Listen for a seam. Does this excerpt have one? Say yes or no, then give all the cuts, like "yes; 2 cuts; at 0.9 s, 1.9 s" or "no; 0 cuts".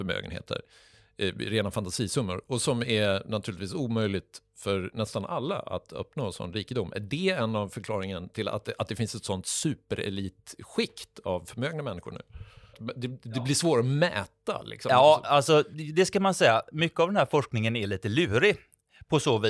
no; 0 cuts